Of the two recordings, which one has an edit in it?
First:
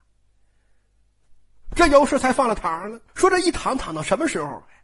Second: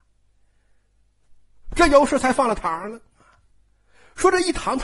first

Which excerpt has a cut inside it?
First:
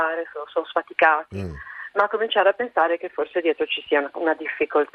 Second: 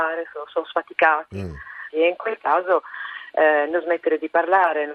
second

